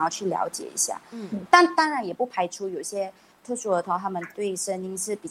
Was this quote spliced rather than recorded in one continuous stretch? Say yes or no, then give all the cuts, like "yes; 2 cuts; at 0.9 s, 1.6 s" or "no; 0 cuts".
yes; 1 cut; at 1.5 s